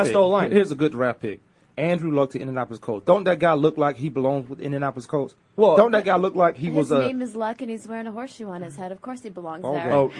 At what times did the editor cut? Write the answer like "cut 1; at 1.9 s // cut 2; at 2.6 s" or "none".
none

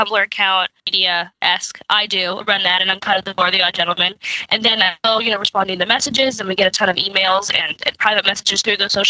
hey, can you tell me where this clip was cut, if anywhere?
cut 1; at 2.4 s

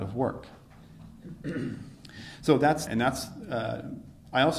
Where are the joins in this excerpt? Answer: cut 1; at 2.9 s

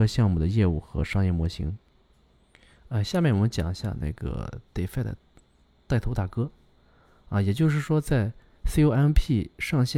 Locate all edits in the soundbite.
none

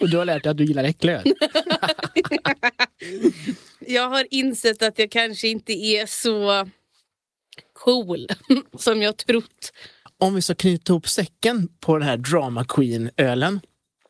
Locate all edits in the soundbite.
cut 1; at 3.9 s

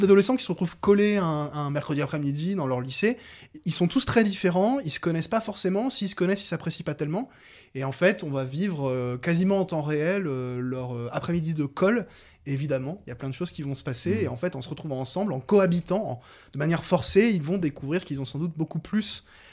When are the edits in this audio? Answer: none

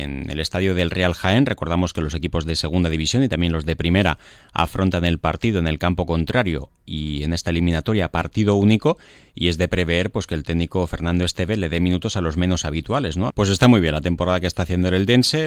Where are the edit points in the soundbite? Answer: cut 1; at 13.3 s

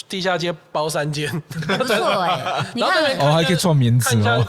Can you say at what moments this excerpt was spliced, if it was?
none

